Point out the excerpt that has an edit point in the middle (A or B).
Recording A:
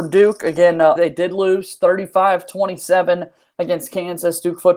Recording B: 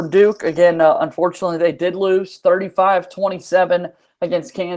A